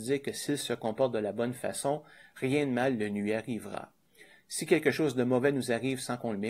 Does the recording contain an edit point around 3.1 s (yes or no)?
no